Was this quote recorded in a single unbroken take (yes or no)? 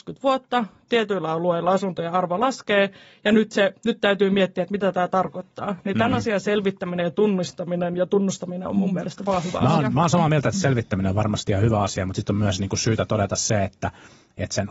yes